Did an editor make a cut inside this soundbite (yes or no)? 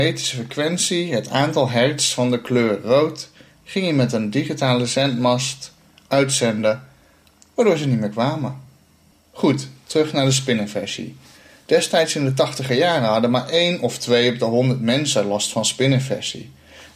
no